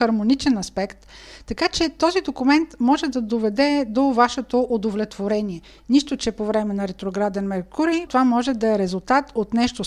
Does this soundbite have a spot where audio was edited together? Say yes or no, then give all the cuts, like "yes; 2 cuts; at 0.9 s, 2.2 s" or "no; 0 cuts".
yes; 1 cut; at 8.1 s